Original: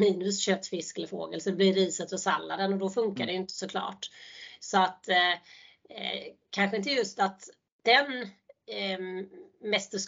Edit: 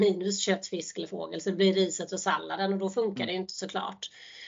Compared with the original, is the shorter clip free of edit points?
yes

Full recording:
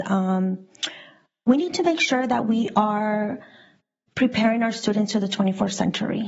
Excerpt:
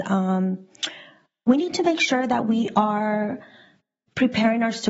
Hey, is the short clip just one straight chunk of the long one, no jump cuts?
yes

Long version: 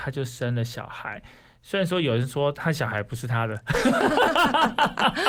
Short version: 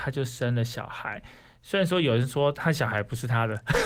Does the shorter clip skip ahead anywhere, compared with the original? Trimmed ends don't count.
no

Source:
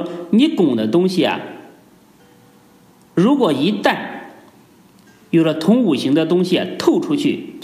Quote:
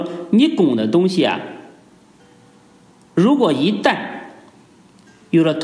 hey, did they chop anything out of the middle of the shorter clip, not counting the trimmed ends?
no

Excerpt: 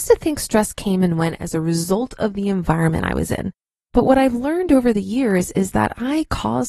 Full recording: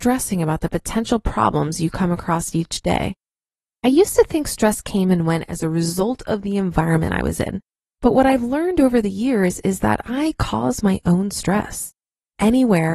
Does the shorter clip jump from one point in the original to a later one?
no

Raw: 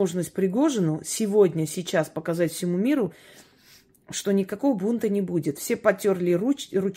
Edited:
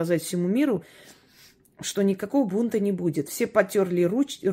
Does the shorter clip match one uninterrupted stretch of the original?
yes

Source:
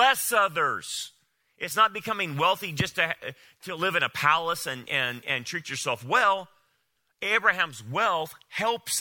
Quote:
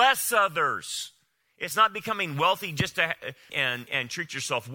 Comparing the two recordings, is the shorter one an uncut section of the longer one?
no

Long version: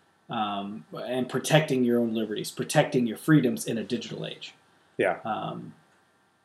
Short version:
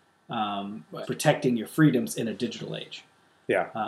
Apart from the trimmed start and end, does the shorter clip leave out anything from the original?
yes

